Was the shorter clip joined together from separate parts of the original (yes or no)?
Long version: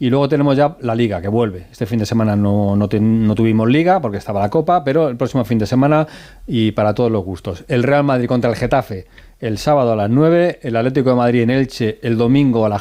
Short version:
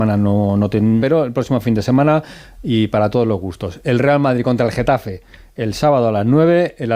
yes